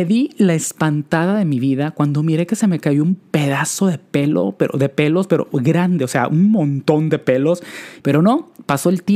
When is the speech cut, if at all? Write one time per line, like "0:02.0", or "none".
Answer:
0:08.0